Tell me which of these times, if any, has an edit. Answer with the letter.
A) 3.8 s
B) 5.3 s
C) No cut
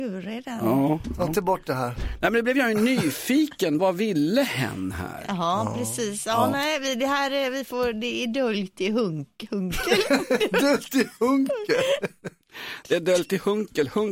A